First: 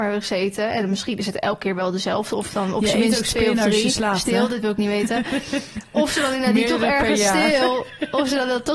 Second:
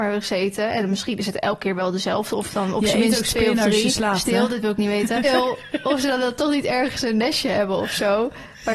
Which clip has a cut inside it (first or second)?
second